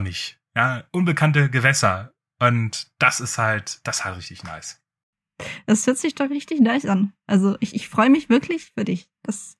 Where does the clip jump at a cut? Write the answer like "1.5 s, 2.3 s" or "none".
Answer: none